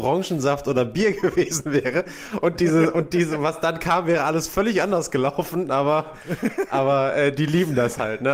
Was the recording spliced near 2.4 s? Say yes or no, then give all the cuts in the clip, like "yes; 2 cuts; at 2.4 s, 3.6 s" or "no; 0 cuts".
no; 0 cuts